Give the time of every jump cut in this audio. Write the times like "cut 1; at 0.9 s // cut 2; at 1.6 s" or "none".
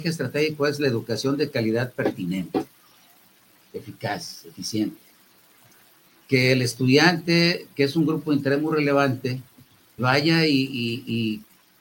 cut 1; at 10.0 s